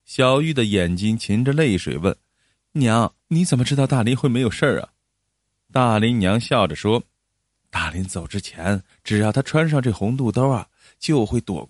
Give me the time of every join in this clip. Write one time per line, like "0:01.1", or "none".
0:03.2
0:08.9